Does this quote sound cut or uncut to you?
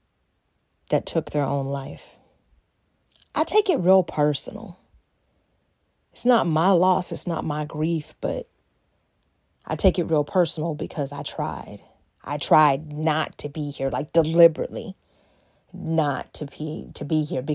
uncut